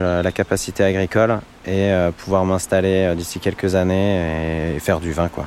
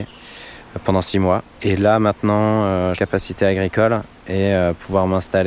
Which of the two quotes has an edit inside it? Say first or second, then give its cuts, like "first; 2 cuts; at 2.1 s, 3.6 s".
second; 2 cuts; at 1.5 s, 2.9 s